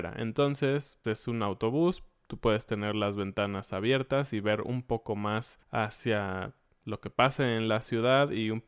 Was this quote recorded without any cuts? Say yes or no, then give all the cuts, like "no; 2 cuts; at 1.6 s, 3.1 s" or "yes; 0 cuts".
no; 2 cuts; at 1.0 s, 5.6 s